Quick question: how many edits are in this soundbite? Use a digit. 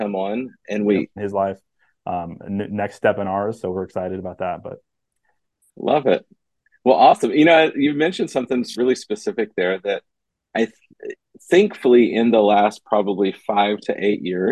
1